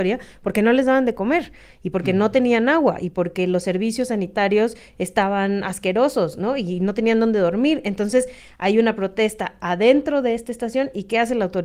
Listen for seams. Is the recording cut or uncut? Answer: uncut